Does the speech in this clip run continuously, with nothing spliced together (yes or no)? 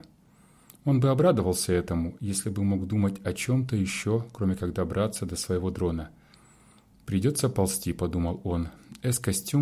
no